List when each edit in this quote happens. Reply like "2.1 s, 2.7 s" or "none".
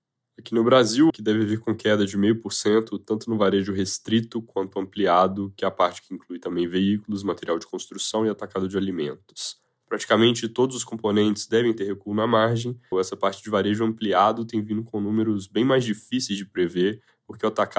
1.1 s, 9.7 s, 12.9 s